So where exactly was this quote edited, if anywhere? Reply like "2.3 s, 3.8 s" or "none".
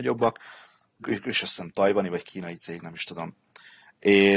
1.0 s